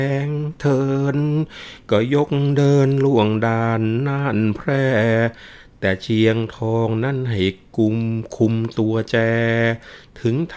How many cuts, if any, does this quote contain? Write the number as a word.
zero